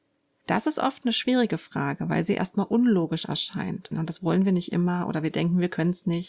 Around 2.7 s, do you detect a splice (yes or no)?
no